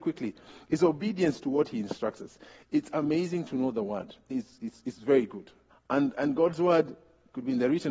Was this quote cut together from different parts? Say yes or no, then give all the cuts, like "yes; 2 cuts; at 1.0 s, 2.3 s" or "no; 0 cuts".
yes; 1 cut; at 5.7 s